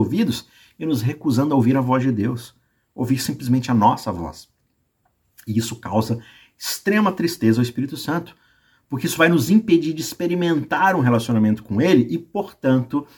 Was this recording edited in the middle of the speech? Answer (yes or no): no